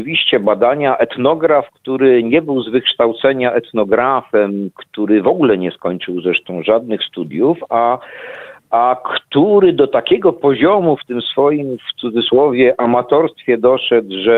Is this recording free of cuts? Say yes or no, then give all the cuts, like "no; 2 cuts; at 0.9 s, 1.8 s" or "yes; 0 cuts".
yes; 0 cuts